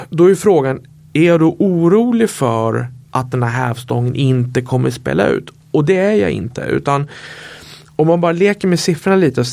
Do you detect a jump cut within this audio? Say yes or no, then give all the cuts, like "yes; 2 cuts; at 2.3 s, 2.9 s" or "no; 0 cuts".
no; 0 cuts